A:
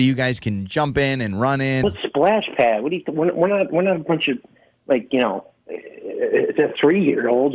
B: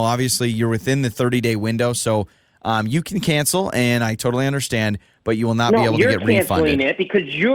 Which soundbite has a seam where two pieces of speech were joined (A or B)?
A